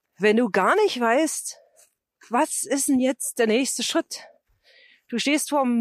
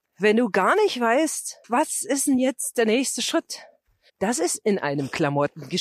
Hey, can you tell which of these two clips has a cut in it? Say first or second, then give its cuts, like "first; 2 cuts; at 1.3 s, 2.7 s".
second; 2 cuts; at 1.6 s, 4.1 s